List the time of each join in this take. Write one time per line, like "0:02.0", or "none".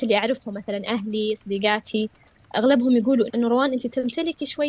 0:03.3